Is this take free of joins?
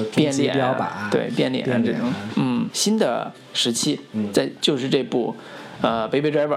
no; 1 cut; at 2.7 s

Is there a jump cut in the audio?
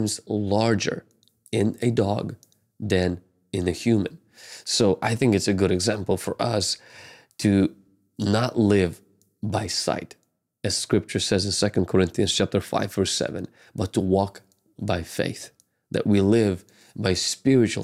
no; 0 cuts

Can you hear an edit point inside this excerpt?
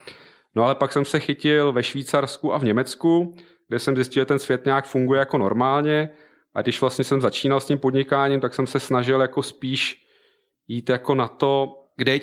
no; 0 cuts

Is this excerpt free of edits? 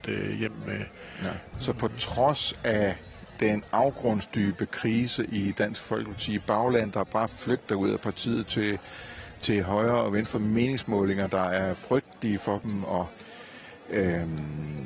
no; 1 cut; at 1.5 s

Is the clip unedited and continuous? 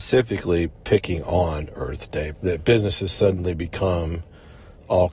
no; 1 cut; at 2.3 s

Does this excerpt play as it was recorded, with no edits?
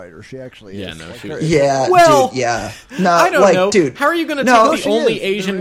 yes; 0 cuts

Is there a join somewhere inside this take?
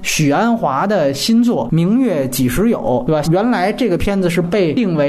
yes; 1 cut; at 3.2 s

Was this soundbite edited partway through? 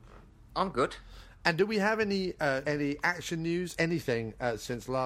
yes; 2 cuts; at 2.6 s, 3.8 s

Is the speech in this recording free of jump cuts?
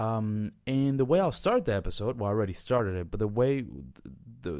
yes; 0 cuts

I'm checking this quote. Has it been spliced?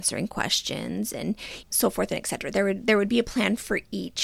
yes; 1 cut; at 1.6 s

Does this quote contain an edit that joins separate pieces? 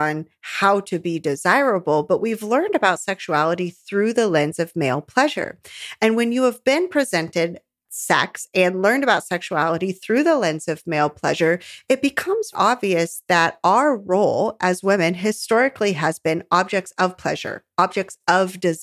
yes; 1 cut; at 12.5 s

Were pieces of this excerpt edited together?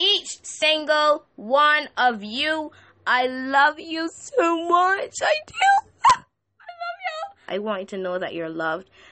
yes; 1 cut; at 7.5 s

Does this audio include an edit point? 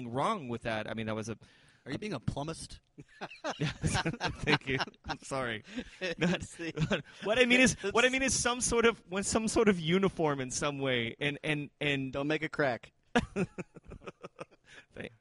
no; 0 cuts

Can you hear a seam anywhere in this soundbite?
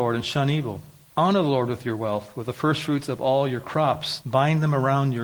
yes; 2 cuts; at 1.1 s, 4.2 s

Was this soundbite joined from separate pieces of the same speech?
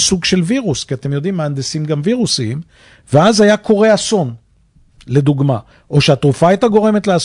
no; 0 cuts

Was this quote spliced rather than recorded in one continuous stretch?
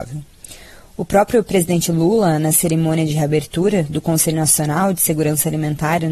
no; 0 cuts

